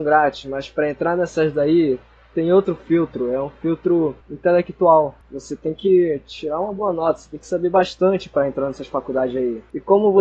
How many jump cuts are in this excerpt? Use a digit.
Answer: 0